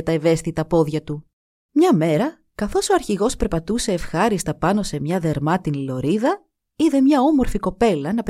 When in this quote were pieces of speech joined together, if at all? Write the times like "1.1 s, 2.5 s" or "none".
1.6 s